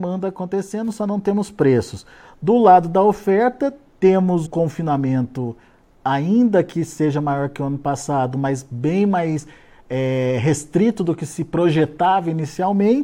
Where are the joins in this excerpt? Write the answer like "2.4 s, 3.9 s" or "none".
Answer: 4.5 s